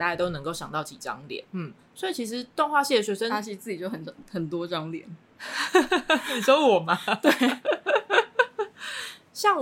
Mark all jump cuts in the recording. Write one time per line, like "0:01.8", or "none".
0:01.5